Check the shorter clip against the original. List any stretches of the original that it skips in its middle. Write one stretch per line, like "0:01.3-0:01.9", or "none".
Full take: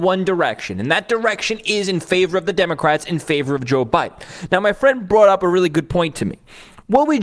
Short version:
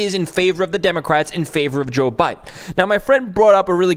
none